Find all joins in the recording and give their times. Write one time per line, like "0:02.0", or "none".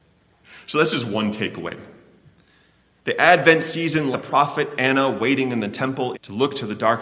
0:04.1
0:06.1